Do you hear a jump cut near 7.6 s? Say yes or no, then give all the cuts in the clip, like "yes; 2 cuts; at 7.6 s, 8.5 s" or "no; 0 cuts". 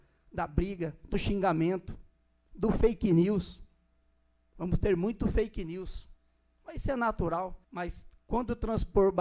yes; 1 cut; at 7.6 s